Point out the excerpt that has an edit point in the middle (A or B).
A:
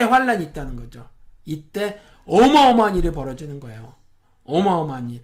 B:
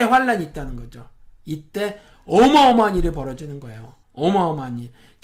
B